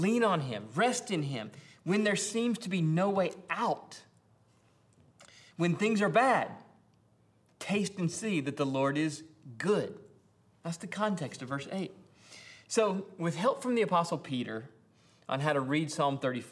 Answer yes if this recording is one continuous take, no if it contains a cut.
yes